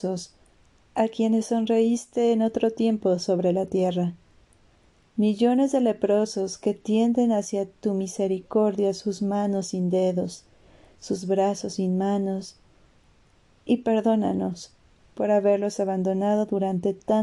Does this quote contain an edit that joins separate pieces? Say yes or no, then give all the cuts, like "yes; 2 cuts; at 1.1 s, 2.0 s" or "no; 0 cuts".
no; 0 cuts